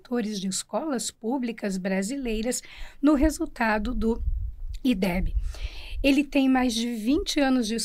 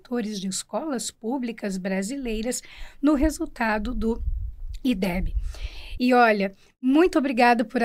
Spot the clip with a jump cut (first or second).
second